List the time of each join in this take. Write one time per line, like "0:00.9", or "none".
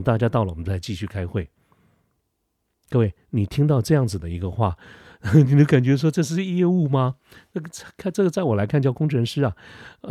none